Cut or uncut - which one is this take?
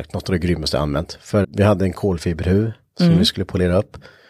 cut